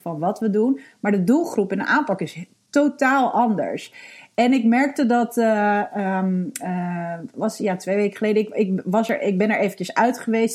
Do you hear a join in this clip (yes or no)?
no